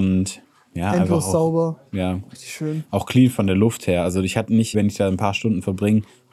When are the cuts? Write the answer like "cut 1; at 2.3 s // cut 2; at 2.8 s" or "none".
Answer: cut 1; at 4.7 s